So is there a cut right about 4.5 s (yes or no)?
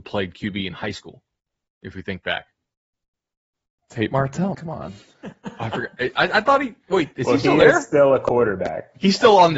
yes